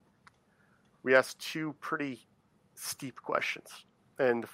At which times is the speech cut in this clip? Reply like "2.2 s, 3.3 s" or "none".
none